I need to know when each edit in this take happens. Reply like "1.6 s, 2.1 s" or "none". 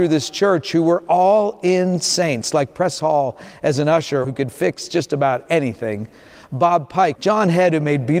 4.2 s, 7.2 s